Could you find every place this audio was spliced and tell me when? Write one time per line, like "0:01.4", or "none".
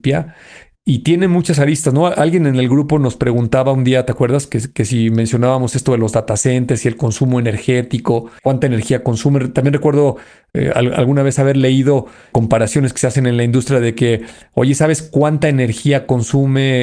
none